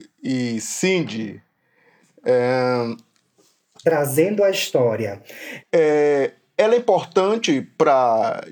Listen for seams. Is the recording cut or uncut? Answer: cut